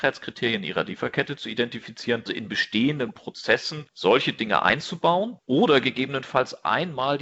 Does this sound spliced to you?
yes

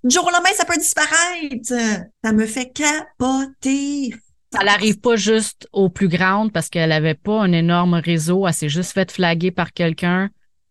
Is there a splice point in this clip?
yes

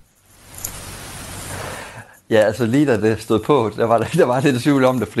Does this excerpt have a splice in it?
no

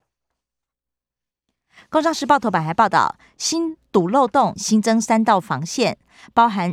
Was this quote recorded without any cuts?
no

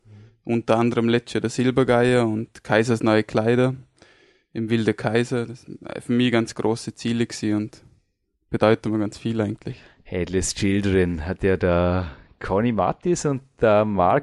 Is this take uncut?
yes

